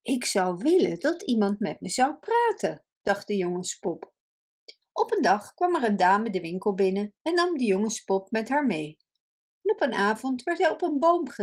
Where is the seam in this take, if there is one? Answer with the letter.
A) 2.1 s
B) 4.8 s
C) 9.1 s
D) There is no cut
B